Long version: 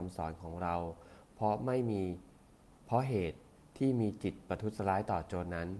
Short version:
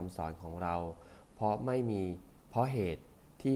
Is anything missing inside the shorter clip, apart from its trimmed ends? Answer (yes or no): yes